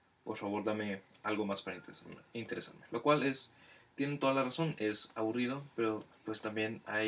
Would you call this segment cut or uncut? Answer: uncut